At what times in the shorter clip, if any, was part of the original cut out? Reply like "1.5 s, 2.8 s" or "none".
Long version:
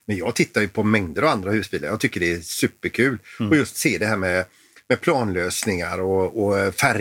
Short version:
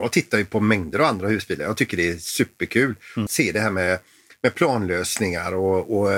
3.3 s

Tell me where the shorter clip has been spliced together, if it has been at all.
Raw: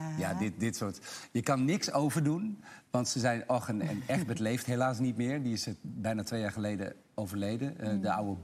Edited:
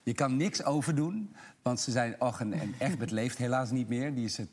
none

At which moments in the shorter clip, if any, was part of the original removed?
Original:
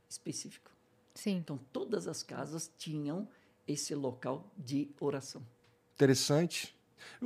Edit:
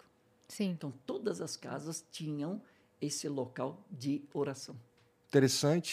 none

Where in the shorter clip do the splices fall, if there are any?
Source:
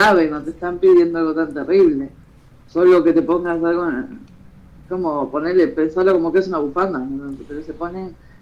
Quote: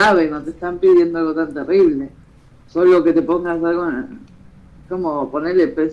none

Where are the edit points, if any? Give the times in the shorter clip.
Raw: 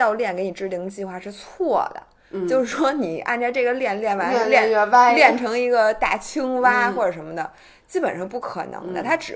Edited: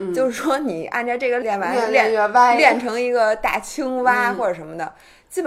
1.4 s

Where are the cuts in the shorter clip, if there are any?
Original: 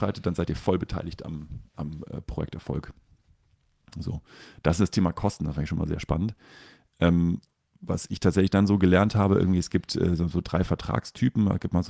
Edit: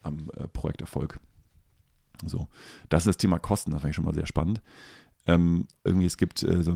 5.9 s

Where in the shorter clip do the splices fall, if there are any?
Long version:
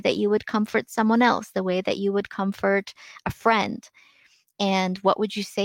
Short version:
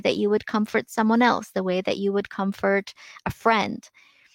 none

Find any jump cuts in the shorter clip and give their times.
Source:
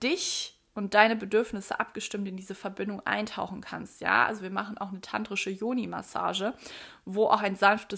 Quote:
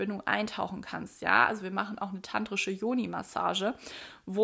none

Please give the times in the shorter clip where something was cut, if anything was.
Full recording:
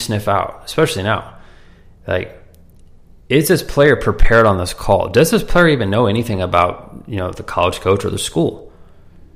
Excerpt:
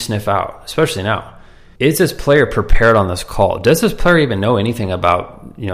1.8 s

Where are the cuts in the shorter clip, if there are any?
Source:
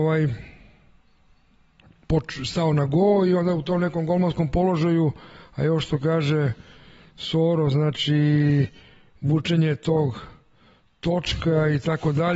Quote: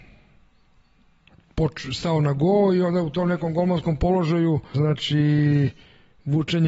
4.7 s

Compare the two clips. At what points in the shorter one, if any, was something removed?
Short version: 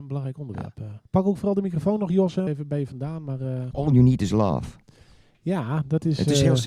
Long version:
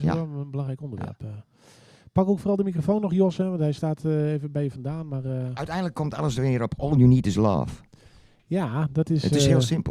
1.1 s, 2.5 s, 3.7 s

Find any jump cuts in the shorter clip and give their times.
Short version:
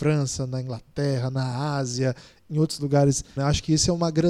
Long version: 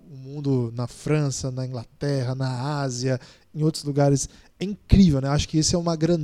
3.4 s

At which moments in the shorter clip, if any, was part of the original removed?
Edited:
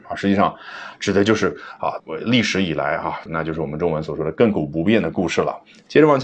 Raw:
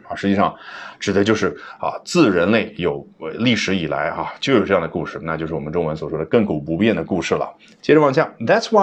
2.0 s, 3.3 s

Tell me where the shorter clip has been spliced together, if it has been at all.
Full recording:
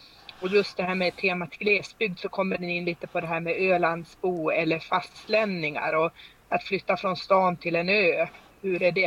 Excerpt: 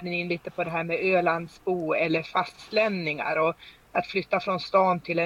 none

